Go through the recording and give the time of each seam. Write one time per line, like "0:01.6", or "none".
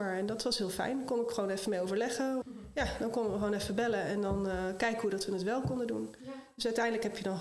0:02.4